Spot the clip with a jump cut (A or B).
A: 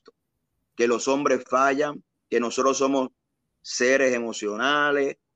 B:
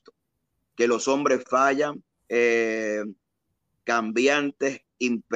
B